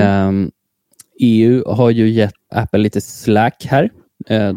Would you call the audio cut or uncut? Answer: cut